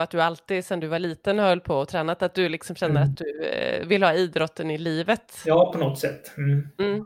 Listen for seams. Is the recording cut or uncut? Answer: uncut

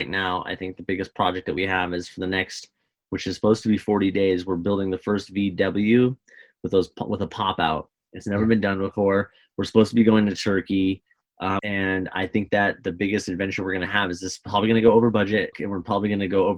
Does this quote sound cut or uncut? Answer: cut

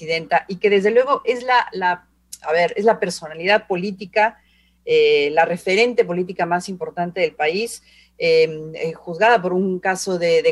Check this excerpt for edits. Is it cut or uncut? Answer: uncut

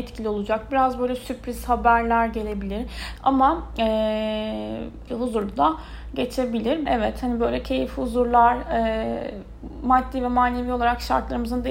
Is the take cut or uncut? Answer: cut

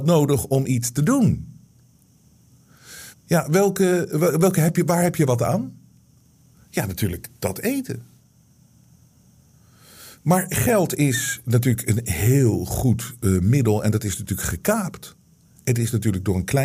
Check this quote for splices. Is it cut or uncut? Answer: cut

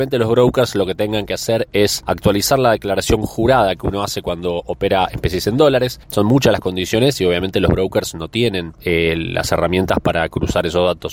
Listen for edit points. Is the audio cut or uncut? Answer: cut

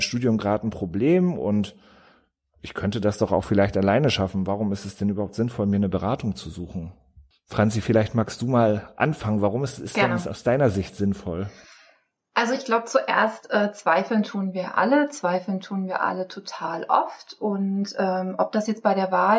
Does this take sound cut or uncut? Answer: uncut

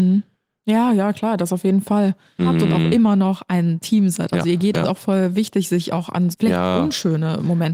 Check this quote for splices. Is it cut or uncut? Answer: cut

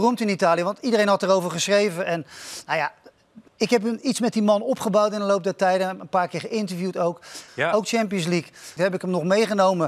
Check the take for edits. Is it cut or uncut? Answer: cut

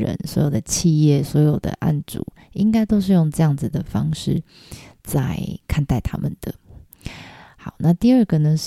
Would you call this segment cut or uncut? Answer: uncut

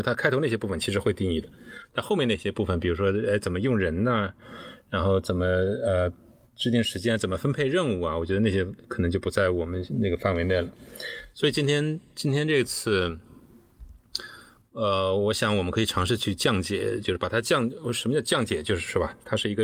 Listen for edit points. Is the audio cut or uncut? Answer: uncut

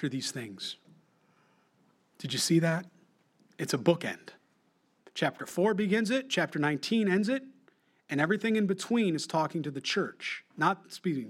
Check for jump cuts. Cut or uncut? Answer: uncut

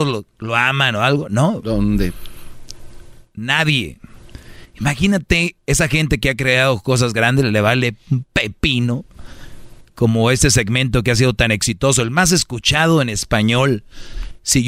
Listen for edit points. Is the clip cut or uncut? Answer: uncut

